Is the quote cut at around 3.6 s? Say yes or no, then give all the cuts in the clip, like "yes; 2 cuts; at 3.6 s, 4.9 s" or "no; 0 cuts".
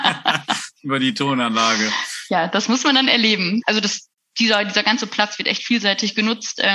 yes; 1 cut; at 3.6 s